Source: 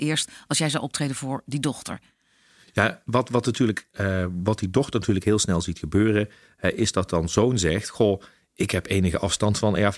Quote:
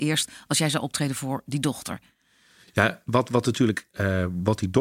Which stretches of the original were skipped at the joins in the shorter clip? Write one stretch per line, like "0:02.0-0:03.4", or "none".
none